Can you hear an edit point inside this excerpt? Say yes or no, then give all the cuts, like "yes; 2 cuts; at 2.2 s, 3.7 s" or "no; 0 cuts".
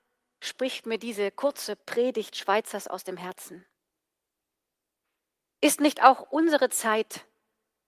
no; 0 cuts